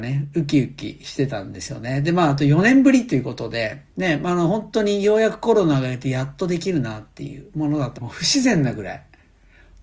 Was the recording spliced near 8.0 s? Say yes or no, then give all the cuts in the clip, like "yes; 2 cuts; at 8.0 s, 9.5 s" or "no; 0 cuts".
yes; 2 cuts; at 3.9 s, 8.0 s